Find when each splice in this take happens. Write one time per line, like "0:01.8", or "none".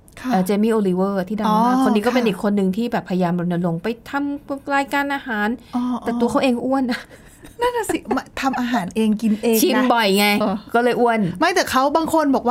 0:10.4